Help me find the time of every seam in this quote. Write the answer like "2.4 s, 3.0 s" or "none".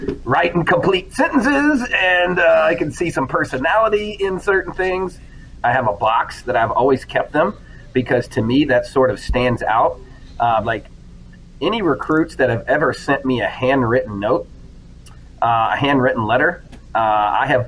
5.6 s, 10.6 s

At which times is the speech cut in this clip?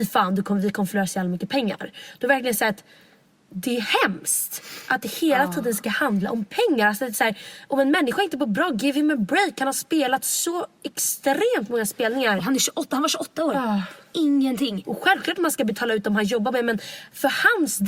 12.4 s, 14.8 s

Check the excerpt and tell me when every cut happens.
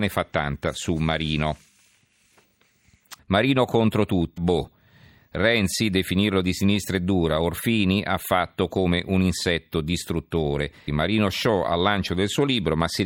3.2 s, 4.4 s, 10.9 s

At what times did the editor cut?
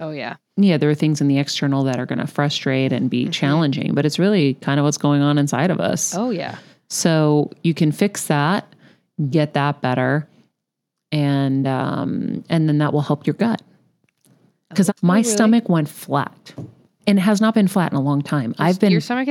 14.9 s, 17.0 s

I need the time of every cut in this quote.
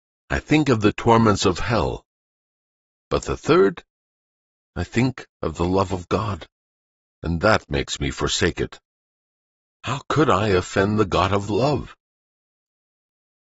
none

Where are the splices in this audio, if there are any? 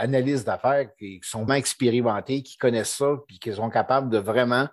1.5 s

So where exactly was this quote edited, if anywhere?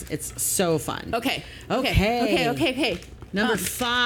none

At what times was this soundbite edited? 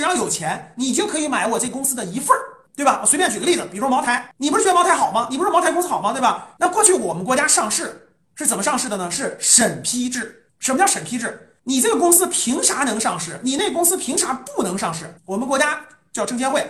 6.6 s, 15.2 s

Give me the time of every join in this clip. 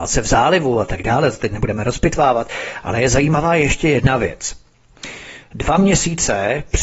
none

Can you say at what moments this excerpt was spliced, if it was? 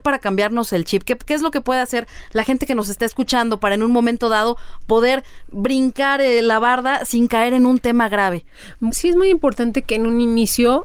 8.9 s

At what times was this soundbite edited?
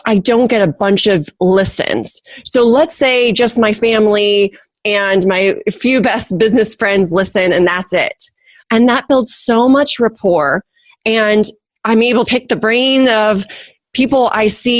8.6 s, 12.2 s

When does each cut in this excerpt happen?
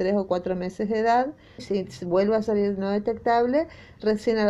1.6 s

